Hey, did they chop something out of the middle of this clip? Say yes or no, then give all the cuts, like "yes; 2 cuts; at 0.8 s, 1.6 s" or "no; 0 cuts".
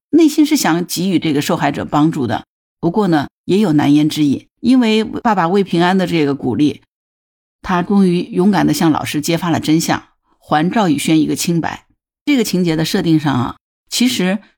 no; 0 cuts